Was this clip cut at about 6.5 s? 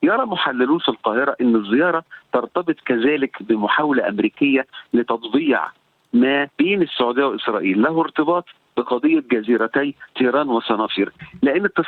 yes; 1 cut; at 6.5 s

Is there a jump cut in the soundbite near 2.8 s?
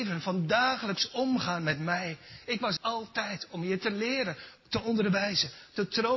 yes; 1 cut; at 2.8 s

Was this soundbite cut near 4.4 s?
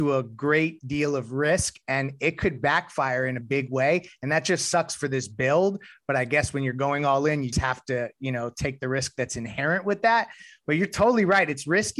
no; 1 cut; at 7.5 s

